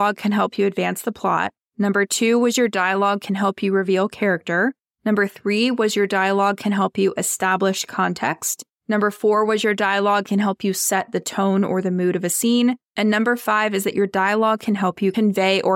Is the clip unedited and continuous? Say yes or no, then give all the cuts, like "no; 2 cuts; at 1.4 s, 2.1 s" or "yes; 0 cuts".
yes; 0 cuts